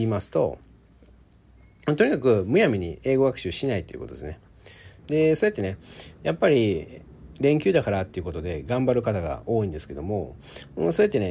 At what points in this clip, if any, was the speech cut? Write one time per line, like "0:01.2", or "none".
0:05.0

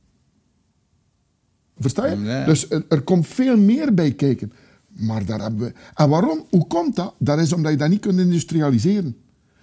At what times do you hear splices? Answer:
0:01.8

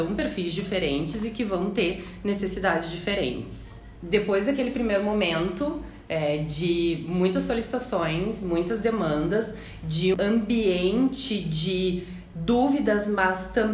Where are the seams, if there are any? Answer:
0:10.1

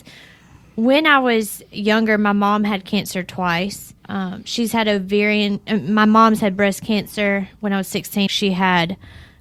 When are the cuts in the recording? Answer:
0:04.0
0:08.3

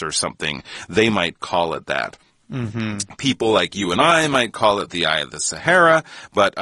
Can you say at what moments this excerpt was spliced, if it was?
none

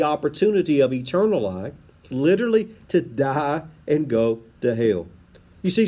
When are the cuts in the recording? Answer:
0:02.1

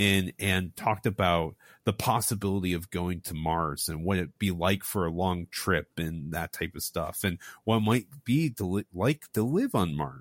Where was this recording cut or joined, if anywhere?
none

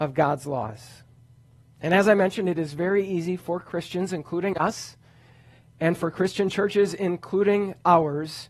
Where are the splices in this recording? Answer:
none

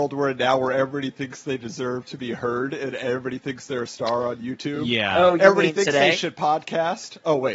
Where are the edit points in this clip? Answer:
none

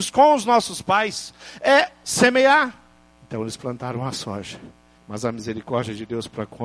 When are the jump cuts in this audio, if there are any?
0:03.1
0:05.0

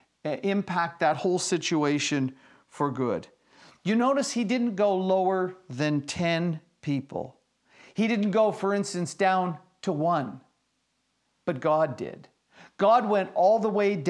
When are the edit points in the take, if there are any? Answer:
none

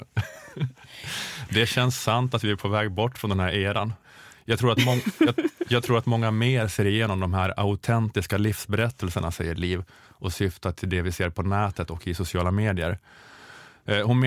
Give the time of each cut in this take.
none

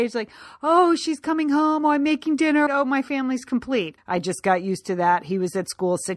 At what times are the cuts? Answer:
0:02.7
0:04.0

